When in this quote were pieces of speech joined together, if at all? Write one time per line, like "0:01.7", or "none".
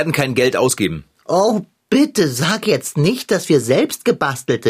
none